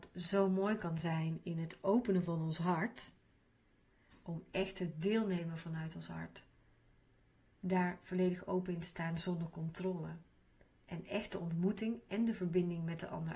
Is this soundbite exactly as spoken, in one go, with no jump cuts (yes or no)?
yes